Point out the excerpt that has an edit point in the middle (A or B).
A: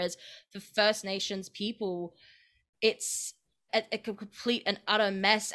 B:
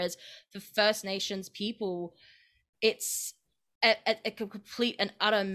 A